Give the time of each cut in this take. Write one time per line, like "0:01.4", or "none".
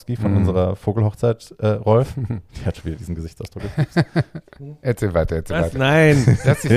none